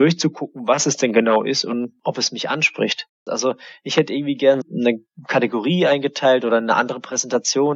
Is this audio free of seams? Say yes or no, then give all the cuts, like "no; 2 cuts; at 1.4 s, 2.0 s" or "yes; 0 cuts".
no; 2 cuts; at 3.3 s, 4.6 s